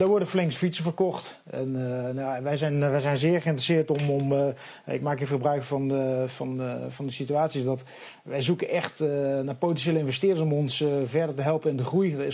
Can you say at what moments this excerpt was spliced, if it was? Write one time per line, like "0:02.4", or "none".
none